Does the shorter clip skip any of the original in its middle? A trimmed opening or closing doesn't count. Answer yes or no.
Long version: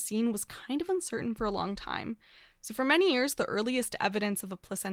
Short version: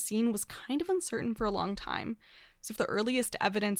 yes